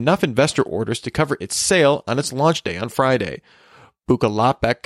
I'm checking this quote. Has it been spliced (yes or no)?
no